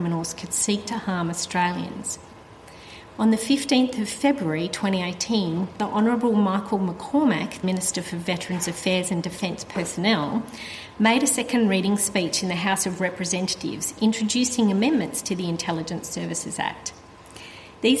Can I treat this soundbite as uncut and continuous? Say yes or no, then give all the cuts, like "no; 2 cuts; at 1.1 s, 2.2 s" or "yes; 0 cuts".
no; 1 cut; at 7.6 s